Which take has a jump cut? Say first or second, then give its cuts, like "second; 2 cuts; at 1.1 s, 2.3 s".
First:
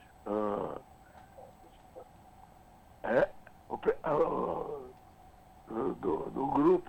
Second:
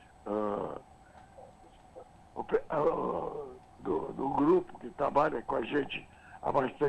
second; 2 cuts; at 2.2 s, 3.8 s